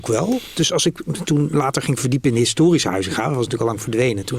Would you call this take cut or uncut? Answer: uncut